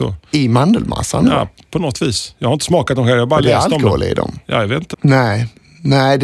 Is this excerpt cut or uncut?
cut